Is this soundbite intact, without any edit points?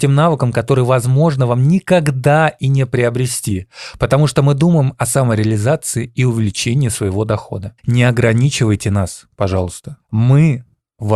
no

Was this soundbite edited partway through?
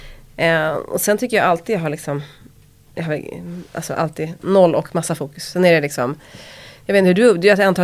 yes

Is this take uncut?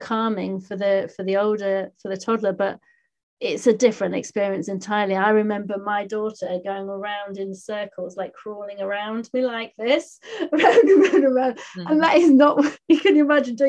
yes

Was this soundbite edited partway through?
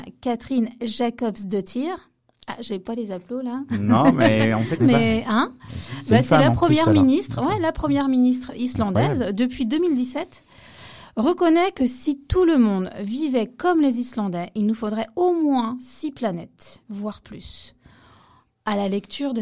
yes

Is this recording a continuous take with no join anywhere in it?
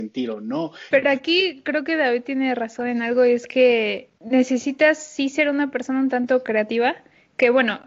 no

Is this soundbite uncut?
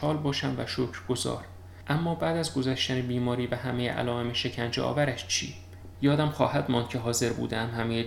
no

